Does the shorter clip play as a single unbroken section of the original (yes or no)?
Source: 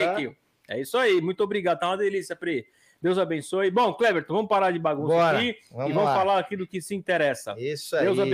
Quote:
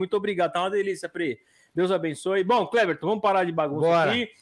yes